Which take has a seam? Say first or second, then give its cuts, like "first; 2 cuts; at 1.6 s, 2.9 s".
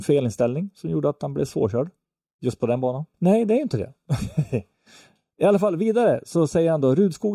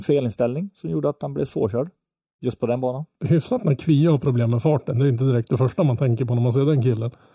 first; 1 cut; at 3.1 s